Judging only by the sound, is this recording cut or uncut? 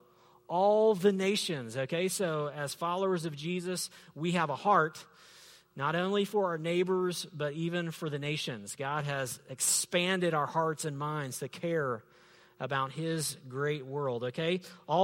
uncut